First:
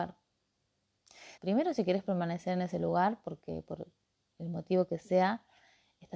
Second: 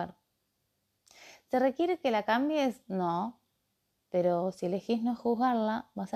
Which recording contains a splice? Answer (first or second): first